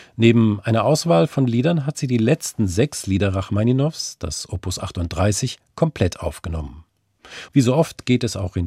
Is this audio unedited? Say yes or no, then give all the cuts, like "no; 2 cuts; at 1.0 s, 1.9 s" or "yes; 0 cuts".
no; 1 cut; at 7.5 s